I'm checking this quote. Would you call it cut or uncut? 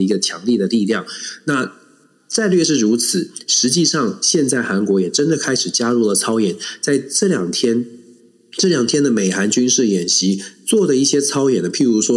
uncut